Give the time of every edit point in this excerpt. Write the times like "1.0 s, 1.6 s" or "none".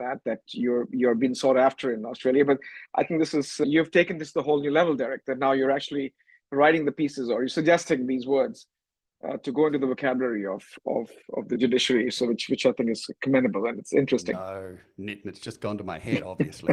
none